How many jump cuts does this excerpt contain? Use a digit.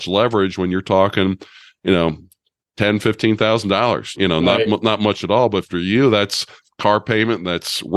1